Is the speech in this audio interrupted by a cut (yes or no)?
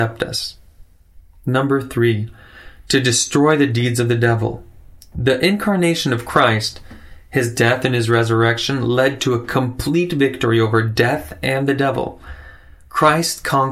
no